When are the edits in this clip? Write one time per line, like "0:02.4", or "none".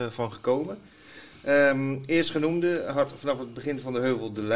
none